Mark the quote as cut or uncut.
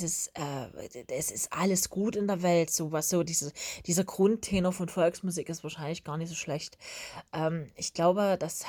uncut